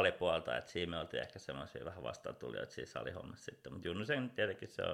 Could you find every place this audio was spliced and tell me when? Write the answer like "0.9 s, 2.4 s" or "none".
none